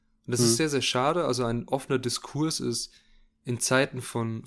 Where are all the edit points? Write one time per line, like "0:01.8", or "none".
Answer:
none